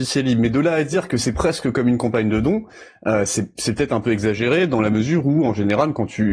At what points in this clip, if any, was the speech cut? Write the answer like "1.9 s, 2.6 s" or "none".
none